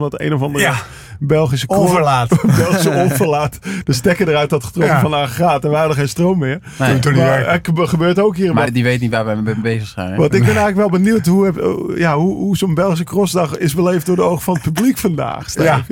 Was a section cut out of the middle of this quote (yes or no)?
yes